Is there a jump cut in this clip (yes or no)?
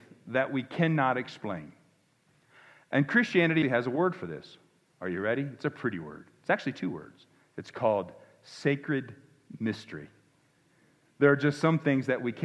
yes